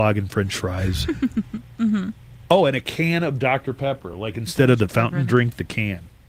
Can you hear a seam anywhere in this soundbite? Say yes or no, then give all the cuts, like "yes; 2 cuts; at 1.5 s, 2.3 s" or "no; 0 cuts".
no; 0 cuts